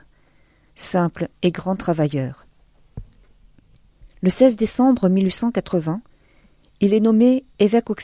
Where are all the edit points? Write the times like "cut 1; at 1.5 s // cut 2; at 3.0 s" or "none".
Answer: none